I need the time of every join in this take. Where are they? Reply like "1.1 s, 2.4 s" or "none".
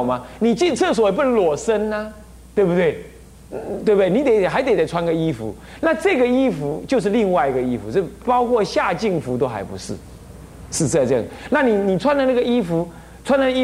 none